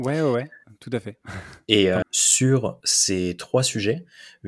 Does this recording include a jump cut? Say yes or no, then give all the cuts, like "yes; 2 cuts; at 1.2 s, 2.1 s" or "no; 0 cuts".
yes; 1 cut; at 2.0 s